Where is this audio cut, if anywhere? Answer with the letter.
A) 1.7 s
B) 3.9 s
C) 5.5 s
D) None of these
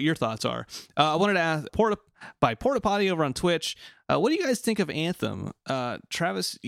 A